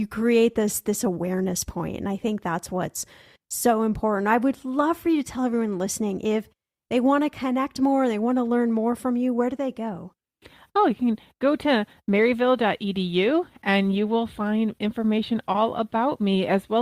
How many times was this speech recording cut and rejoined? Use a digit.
0